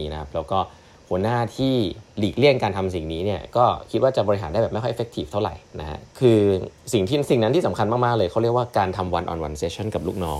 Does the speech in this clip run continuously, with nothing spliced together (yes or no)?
no